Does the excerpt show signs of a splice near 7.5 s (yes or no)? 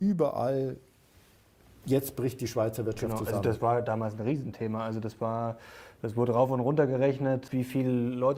yes